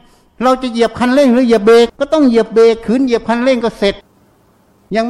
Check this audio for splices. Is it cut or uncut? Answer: cut